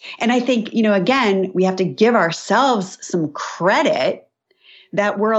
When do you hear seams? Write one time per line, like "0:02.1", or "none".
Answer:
none